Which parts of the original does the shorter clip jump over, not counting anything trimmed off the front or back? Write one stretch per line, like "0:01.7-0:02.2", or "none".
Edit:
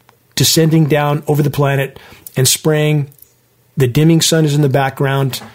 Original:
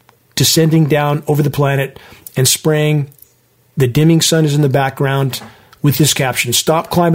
none